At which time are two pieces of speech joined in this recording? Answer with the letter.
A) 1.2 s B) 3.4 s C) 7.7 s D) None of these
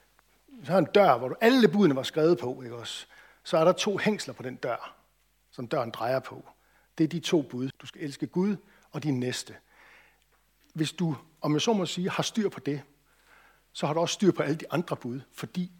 C